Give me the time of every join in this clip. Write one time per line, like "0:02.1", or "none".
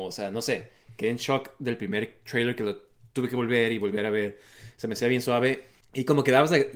0:05.8